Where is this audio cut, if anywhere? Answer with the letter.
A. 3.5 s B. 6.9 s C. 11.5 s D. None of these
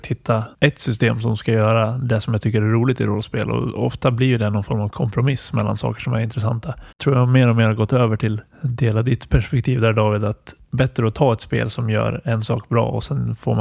B